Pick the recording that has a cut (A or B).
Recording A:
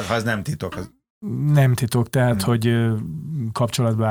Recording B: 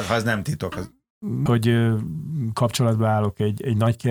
B